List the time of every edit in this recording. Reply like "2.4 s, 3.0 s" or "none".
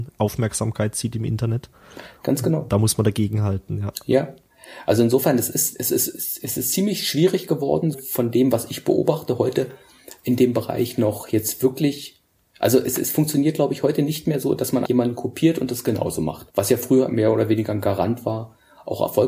7.9 s, 14.8 s, 16.5 s